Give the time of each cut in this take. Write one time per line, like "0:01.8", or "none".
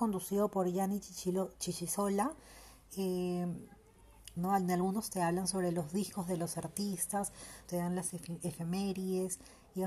0:04.4
0:07.7